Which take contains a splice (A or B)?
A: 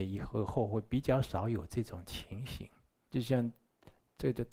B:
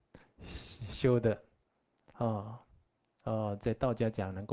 A